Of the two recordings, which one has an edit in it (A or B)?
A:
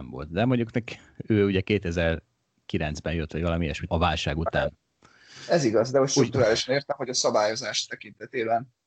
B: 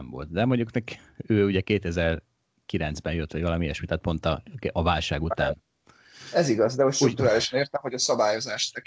A